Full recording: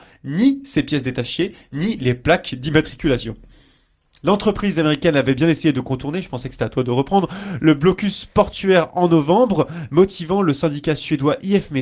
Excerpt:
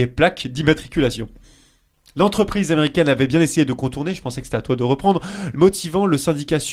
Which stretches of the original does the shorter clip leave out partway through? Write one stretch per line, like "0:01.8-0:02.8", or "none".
0:07.6-0:09.9